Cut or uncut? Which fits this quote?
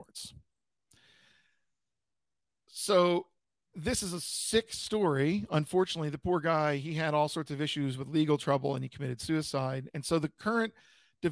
uncut